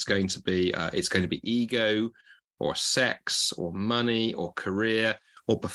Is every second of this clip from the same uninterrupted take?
yes; 0 cuts

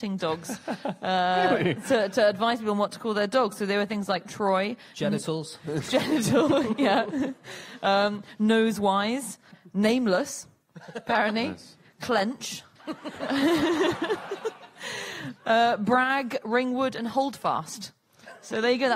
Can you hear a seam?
no; 0 cuts

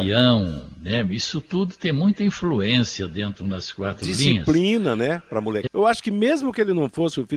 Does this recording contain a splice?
yes; 1 cut; at 5.7 s

